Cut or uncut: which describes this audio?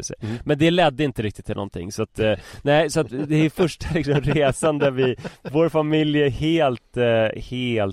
uncut